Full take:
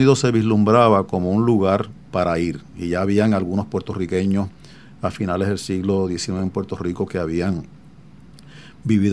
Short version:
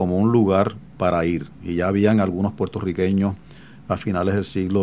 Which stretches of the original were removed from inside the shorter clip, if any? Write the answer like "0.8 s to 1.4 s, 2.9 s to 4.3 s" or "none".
none